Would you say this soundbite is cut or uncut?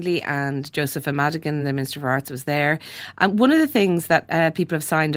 uncut